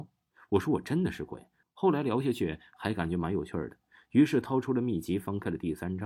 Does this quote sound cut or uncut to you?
cut